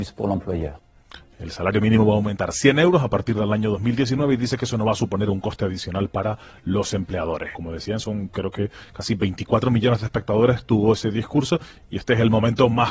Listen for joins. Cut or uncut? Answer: cut